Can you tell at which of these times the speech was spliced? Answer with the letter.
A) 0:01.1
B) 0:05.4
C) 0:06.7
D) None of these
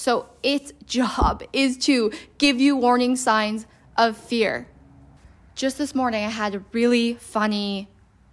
D